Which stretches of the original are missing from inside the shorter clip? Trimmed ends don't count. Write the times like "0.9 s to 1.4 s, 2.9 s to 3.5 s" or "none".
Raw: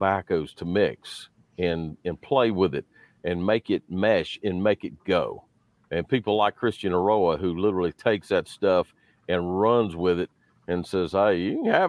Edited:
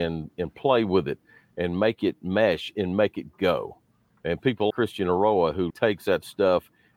6.4 s to 6.5 s, 7.5 s to 7.9 s